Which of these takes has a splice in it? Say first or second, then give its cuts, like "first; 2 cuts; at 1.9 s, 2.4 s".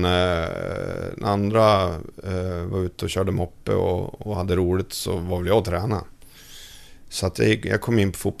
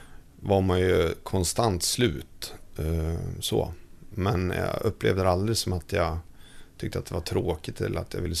second; 1 cut; at 2.7 s